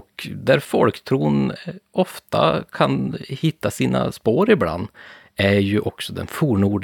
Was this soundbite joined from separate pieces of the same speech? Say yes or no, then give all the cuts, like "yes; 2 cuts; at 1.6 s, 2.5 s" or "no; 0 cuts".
no; 0 cuts